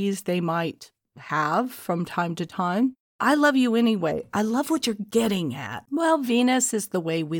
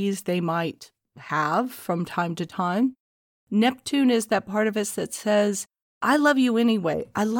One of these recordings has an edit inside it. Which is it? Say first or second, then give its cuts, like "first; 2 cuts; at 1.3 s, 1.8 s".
first; 2 cuts; at 3.1 s, 5.9 s